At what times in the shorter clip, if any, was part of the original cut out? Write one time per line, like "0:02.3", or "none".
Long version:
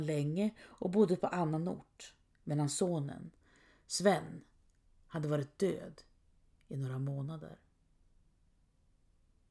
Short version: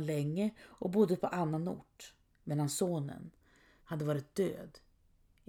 0:03.8